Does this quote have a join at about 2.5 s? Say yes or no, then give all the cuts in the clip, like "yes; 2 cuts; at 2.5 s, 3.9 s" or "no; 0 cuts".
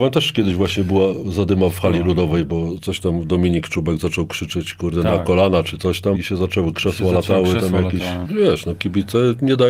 no; 2 cuts; at 6.1 s, 8.2 s